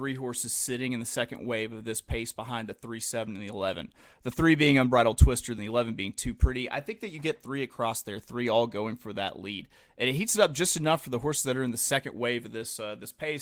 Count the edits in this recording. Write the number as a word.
one